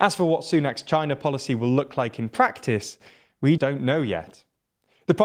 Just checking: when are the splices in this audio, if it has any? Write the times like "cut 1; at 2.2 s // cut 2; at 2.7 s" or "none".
cut 1; at 3.6 s